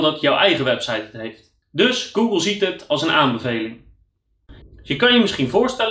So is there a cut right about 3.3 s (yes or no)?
no